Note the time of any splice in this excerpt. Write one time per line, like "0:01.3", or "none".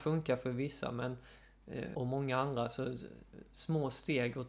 0:01.9